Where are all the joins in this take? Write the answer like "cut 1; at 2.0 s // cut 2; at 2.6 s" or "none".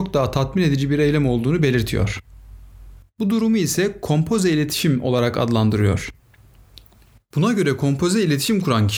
none